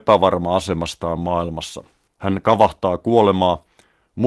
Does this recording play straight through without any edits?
no; 1 cut; at 2.1 s

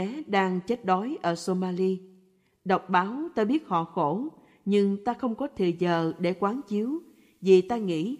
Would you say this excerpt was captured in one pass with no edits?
yes; 0 cuts

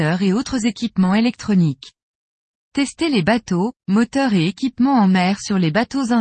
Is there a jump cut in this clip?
yes; 1 cut; at 2.5 s

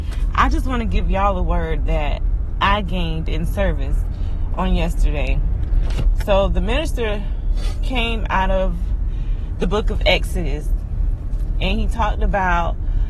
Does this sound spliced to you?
no; 0 cuts

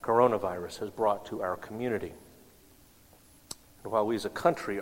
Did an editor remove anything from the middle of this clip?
yes; 1 cut; at 3.6 s

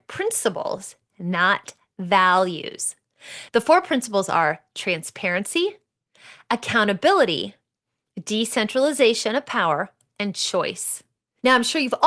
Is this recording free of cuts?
no; 1 cut; at 3.5 s

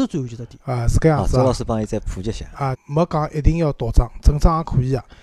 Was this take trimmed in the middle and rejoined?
yes; 1 cut; at 2.7 s

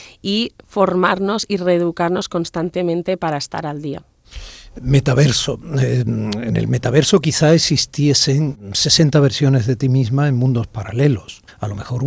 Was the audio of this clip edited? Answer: no; 0 cuts

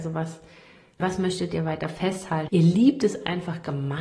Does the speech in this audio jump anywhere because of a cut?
yes; 2 cuts; at 1.0 s, 2.5 s

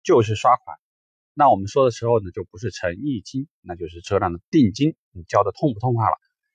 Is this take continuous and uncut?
yes; 0 cuts

